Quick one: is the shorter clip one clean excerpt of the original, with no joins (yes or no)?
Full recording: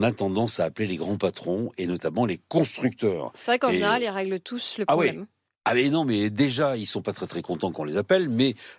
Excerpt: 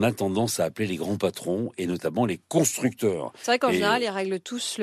yes